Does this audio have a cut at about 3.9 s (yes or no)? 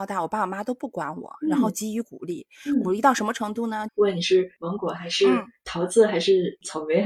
yes